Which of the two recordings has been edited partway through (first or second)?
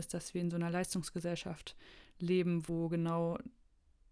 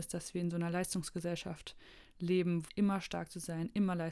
second